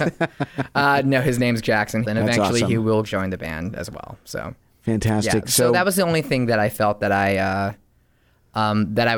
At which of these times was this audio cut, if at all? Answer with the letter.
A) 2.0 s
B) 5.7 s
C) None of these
A